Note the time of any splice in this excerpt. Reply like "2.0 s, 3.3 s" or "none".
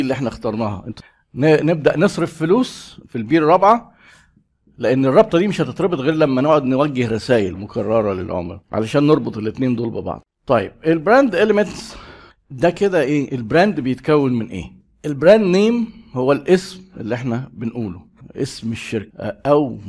8.6 s